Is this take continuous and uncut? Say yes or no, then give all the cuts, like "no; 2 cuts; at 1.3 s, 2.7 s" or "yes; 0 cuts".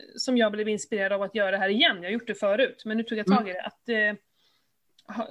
yes; 0 cuts